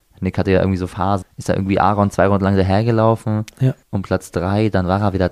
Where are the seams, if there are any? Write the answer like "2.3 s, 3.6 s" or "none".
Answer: 1.2 s, 3.8 s